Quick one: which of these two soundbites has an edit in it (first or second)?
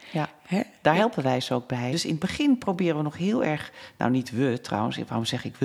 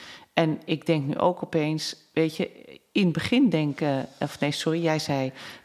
first